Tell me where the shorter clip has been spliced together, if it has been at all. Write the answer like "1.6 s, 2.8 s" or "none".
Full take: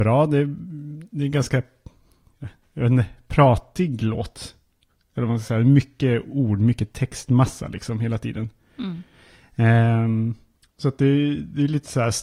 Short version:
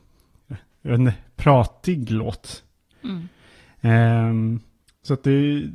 2.9 s